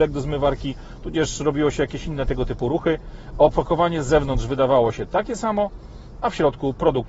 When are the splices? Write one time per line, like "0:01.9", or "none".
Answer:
none